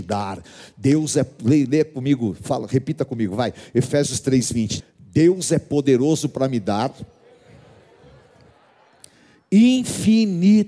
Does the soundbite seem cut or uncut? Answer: cut